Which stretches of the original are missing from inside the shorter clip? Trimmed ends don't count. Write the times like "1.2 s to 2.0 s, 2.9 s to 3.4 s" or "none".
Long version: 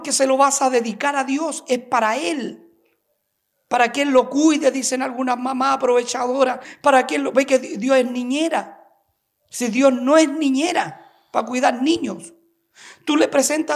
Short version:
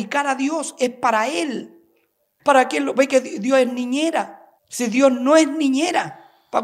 3.3 s to 6.8 s, 9.0 s to 9.4 s